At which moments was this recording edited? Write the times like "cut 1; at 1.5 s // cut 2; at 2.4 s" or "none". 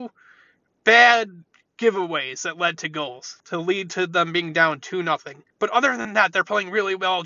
cut 1; at 3.4 s // cut 2; at 5.5 s